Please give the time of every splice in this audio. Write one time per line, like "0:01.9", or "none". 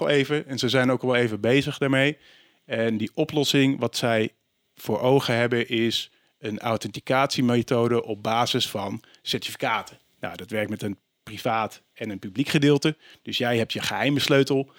none